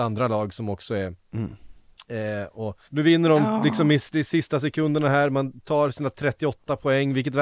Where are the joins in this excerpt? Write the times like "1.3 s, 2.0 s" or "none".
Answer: 2.9 s